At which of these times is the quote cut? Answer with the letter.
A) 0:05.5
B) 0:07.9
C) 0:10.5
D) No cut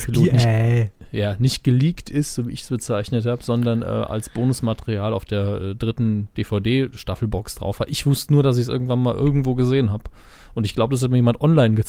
D